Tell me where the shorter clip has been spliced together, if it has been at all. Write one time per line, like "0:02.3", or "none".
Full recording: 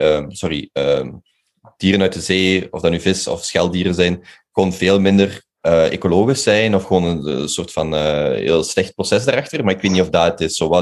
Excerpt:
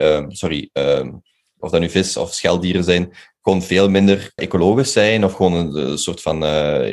0:01.6
0:04.4